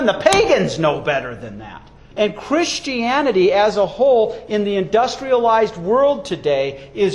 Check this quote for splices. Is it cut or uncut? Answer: cut